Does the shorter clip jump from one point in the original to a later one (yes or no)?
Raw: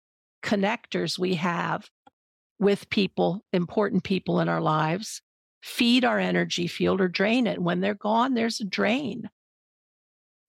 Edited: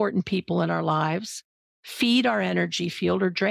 no